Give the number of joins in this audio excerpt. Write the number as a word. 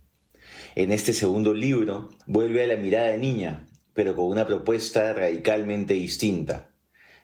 one